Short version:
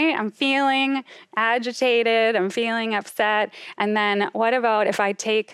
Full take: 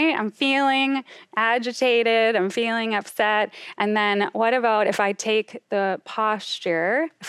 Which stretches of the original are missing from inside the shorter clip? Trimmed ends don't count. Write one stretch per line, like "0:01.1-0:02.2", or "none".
none